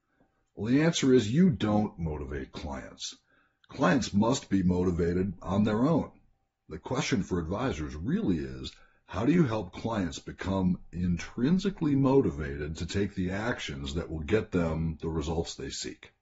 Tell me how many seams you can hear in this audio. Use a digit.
0